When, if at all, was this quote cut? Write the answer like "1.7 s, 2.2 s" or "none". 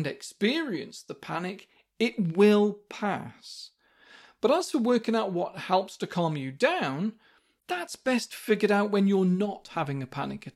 none